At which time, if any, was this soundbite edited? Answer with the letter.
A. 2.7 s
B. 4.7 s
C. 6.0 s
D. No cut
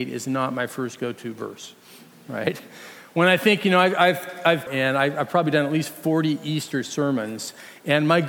B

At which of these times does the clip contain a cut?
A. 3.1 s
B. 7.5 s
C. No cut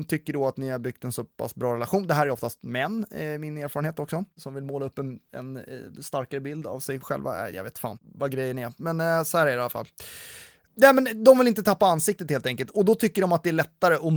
C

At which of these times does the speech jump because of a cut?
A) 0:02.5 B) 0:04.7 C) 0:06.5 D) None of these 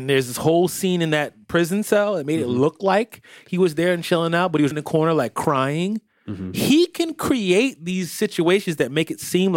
B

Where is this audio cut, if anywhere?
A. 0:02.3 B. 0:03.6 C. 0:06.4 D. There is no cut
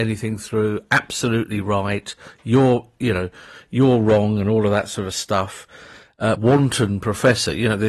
C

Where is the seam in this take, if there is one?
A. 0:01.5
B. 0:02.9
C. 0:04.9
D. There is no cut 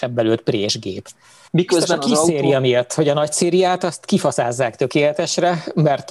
A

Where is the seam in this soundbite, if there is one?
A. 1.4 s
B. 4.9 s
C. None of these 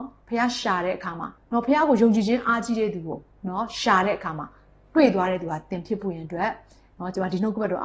A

